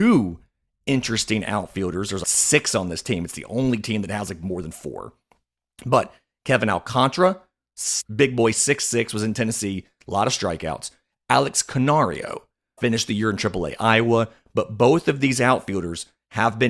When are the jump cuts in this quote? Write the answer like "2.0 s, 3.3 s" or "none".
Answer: none